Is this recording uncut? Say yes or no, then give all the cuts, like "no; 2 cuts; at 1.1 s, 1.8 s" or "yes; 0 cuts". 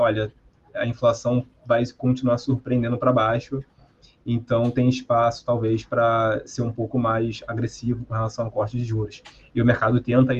yes; 0 cuts